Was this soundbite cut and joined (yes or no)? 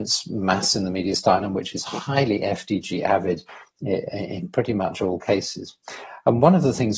no